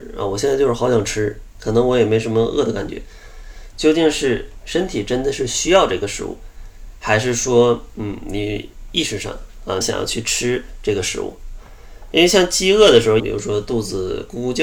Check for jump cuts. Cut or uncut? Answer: cut